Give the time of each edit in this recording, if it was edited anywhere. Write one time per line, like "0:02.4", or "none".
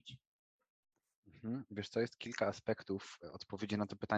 none